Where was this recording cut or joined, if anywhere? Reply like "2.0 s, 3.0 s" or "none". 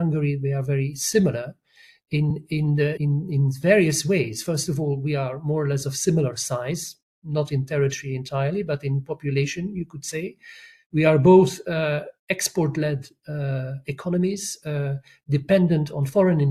3.0 s